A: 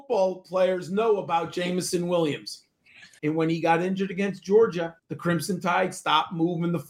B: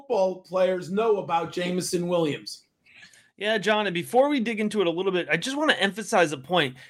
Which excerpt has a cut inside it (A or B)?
A